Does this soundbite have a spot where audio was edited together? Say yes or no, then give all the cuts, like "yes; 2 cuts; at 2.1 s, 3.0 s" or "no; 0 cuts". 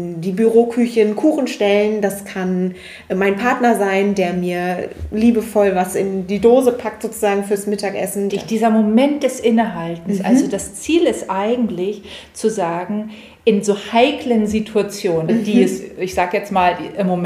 yes; 2 cuts; at 8.3 s, 15.3 s